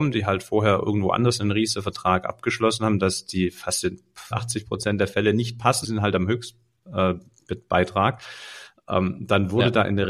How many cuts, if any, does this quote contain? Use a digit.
2